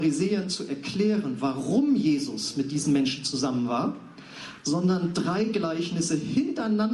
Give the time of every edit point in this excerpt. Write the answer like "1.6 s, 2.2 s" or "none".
4.6 s